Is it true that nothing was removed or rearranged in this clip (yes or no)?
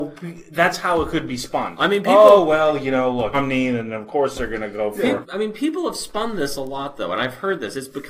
no